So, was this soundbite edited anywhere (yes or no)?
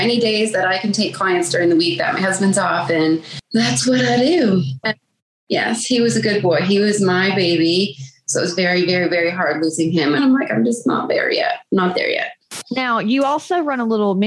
yes